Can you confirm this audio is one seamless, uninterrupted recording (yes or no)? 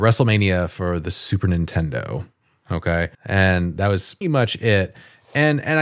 no